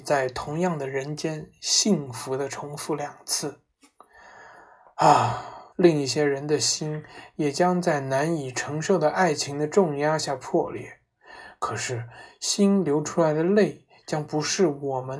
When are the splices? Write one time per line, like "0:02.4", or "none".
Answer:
0:05.7